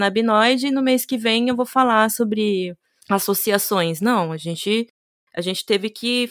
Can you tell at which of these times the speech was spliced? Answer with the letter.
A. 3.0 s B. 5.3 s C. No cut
A